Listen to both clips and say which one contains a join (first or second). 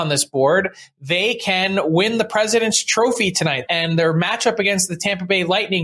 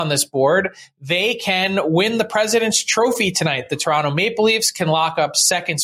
first